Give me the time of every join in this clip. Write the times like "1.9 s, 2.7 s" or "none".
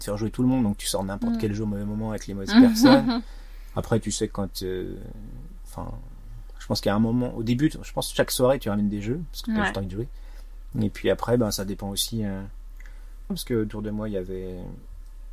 10.7 s, 13.3 s